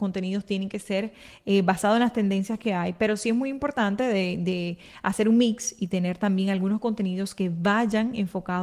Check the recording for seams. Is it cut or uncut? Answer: uncut